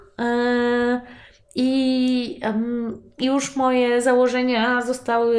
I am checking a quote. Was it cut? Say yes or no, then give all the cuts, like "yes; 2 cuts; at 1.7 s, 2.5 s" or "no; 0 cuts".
no; 0 cuts